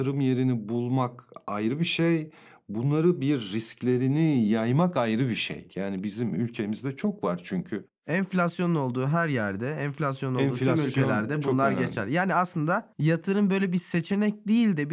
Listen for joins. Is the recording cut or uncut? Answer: cut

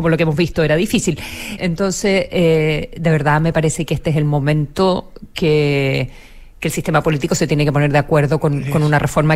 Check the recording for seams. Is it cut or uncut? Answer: cut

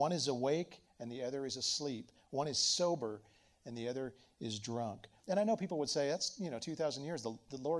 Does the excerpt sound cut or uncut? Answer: cut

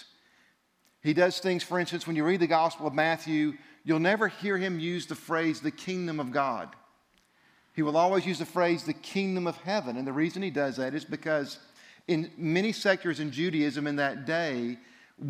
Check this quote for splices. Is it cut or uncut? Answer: uncut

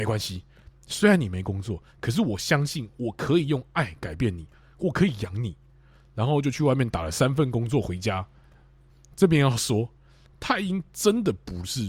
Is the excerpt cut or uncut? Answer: uncut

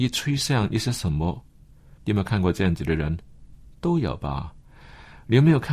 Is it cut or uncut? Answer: cut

